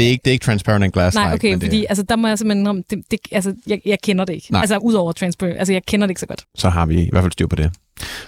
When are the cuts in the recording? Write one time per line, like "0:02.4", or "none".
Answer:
0:06.4